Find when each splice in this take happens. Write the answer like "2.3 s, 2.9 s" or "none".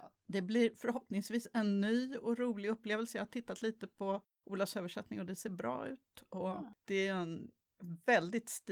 none